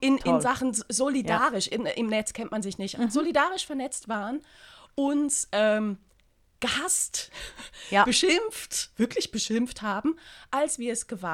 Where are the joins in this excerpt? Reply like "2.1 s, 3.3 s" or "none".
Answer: 1.7 s, 2.9 s